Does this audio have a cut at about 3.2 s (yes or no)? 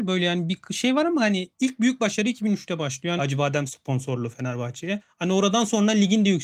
yes